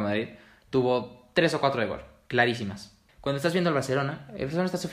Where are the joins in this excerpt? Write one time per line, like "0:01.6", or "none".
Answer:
0:03.1

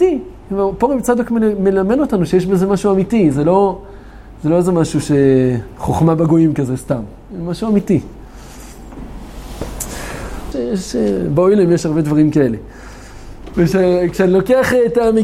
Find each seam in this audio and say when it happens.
0:10.5
0:13.5

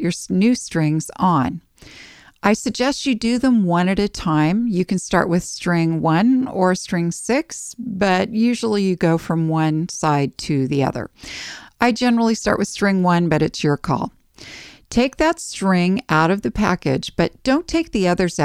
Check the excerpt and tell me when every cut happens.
none

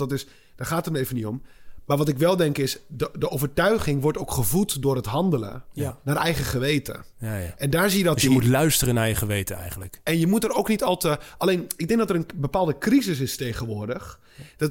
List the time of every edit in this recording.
0:10.1

